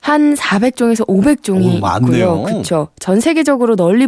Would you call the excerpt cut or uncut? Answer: uncut